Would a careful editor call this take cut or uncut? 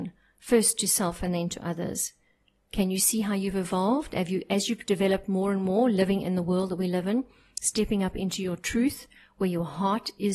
uncut